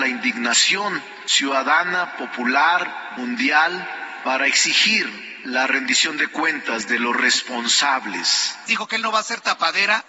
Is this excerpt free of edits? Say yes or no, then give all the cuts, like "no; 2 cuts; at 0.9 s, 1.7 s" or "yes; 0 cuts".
no; 1 cut; at 8.7 s